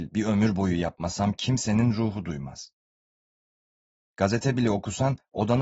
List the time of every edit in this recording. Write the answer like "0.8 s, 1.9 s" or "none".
4.0 s